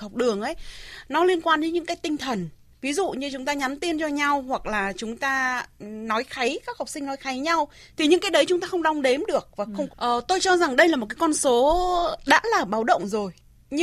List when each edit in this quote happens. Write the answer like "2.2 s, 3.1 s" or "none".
9.9 s